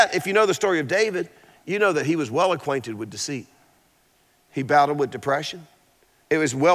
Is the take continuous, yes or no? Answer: yes